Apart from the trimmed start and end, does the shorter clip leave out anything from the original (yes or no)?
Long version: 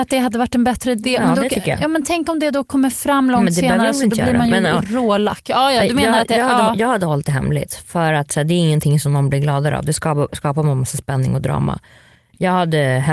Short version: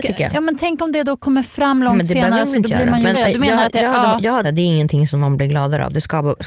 yes